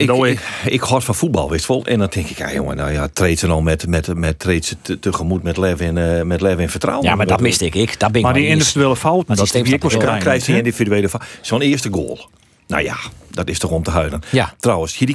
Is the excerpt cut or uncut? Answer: uncut